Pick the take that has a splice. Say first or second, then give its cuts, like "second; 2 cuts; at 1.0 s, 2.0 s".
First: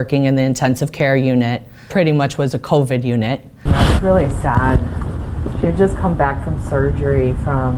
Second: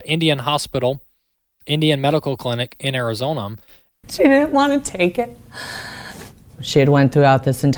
second; 2 cuts; at 3.9 s, 6.6 s